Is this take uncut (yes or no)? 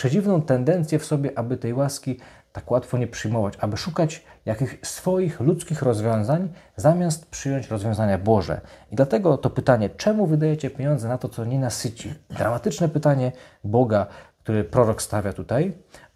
yes